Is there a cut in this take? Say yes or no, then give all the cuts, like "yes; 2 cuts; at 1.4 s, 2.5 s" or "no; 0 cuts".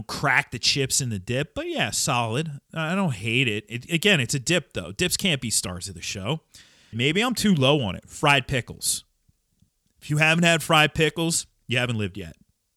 yes; 1 cut; at 6.9 s